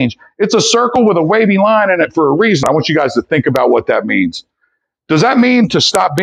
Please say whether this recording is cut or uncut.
cut